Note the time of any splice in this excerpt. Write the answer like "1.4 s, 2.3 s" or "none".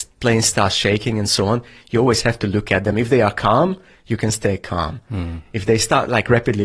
none